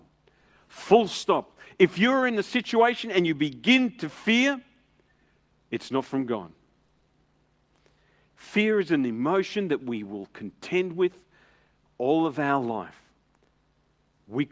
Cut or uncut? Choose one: uncut